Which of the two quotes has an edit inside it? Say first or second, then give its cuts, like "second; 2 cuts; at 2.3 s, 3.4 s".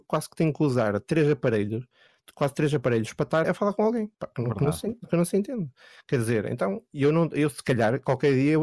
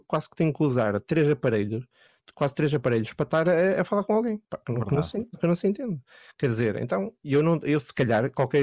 first; 1 cut; at 3.4 s